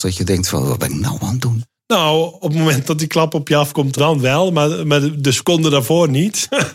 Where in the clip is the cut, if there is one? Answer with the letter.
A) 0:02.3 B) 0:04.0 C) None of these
B